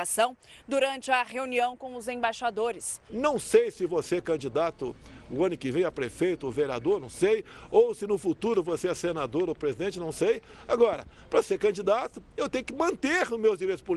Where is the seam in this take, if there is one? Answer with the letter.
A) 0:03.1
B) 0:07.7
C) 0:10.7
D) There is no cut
A